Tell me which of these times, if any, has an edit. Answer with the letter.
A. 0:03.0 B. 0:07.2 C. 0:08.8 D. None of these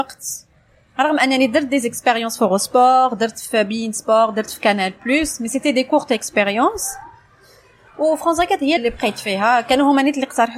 C